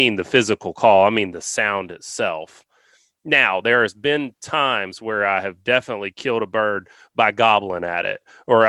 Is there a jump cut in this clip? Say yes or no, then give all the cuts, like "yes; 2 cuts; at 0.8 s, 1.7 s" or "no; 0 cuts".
no; 0 cuts